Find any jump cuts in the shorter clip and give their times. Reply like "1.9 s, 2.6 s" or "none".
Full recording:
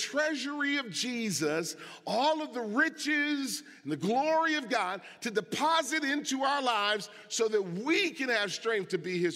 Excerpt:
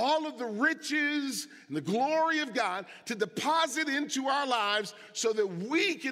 none